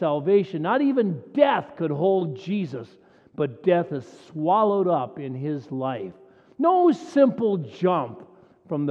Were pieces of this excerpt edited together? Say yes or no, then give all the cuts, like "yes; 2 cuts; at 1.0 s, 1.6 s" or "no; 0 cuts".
no; 0 cuts